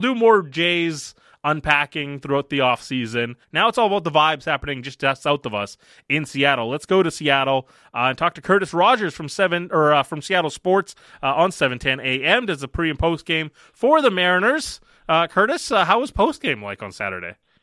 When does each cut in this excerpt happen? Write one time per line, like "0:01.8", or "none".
0:03.4

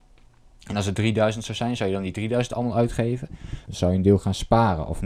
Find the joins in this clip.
0:03.7

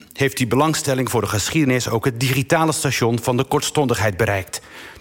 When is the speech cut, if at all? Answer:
none

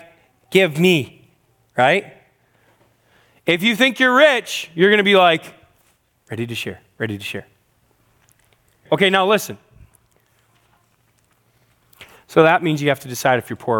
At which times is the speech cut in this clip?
0:06.2
0:08.9

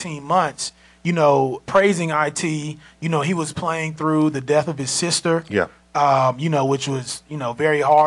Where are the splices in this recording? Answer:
0:01.6

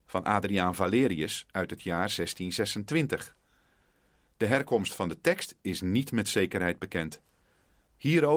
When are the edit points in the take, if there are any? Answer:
none

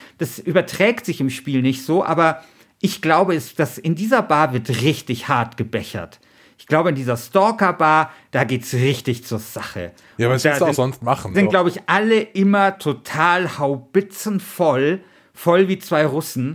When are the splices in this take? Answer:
0:11.3

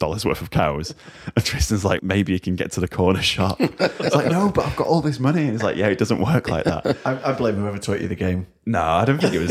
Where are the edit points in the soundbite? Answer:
0:02.0

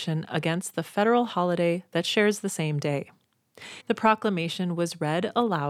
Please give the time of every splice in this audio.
0:03.8

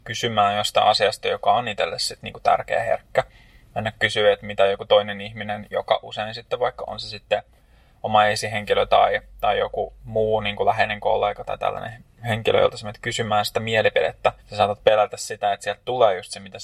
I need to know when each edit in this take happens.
0:14.4

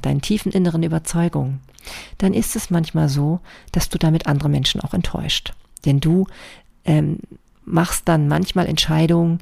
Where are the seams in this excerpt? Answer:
none

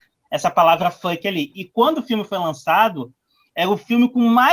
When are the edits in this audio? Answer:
none

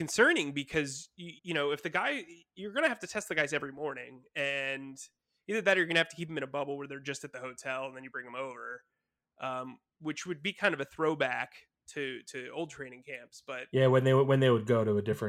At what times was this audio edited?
0:01.4

